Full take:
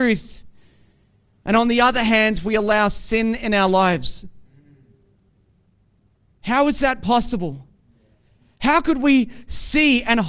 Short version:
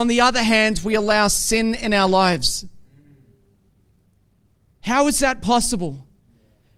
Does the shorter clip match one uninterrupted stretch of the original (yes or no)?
yes